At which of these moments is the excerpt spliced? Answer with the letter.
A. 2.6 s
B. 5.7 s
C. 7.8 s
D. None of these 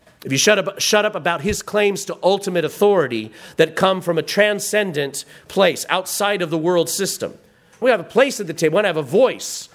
C